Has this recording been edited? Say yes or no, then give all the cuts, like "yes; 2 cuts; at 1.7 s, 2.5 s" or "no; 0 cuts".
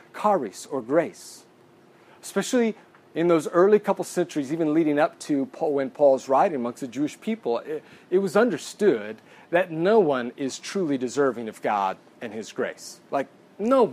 no; 0 cuts